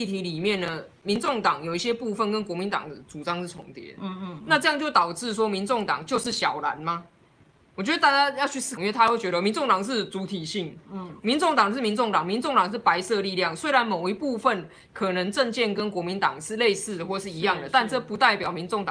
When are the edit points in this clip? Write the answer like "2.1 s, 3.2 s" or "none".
8.8 s